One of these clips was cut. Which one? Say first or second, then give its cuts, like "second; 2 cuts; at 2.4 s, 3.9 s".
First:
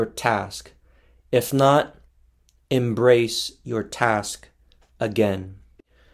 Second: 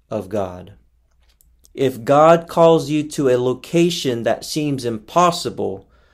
second; 1 cut; at 1.7 s